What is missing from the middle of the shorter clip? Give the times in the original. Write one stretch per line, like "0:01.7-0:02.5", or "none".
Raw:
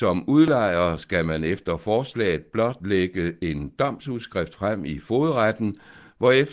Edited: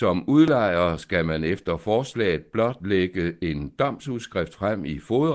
none